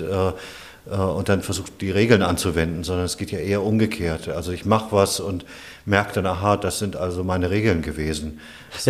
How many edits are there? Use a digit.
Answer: 0